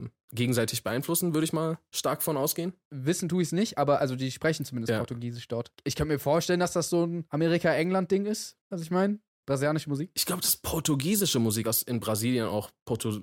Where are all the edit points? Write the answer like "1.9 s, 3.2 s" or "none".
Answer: 9.4 s, 11.6 s